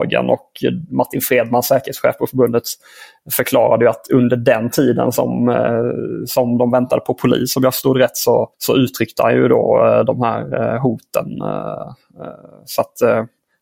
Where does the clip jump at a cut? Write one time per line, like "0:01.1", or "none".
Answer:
0:08.5

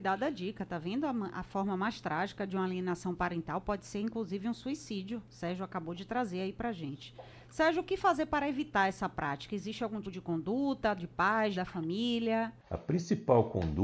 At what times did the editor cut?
0:10.0
0:11.5

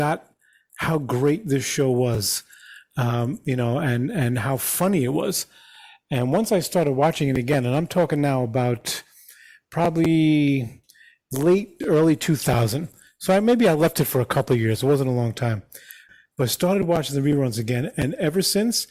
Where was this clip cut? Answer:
0:11.8

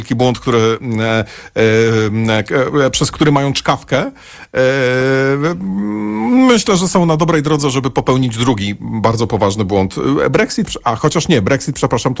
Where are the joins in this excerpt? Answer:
none

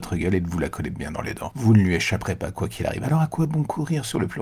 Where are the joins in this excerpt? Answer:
none

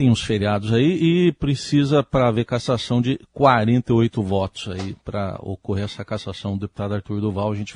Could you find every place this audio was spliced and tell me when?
none

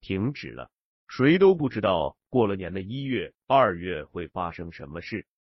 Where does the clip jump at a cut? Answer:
none

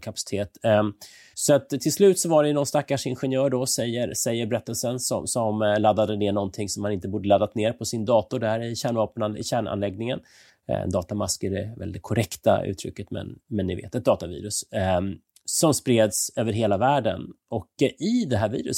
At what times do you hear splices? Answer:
0:01.3
0:10.5

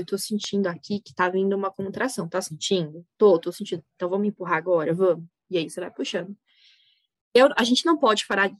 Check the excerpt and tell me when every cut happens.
none

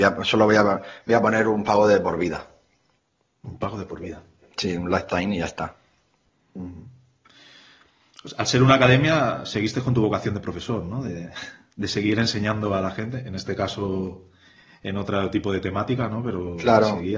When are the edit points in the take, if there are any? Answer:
none

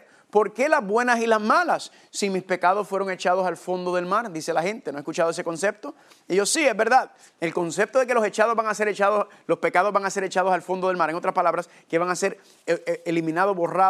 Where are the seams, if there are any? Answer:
none

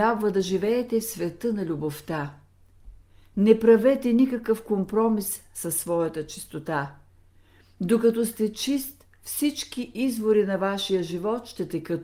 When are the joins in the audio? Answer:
none

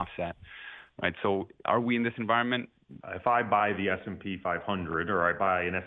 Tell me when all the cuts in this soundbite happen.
0:03.0

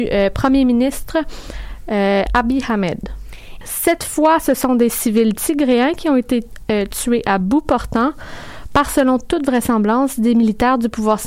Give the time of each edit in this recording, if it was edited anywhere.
0:03.6

